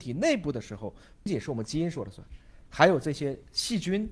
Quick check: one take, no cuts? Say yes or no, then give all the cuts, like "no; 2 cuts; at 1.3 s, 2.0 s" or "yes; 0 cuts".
no; 1 cut; at 1.3 s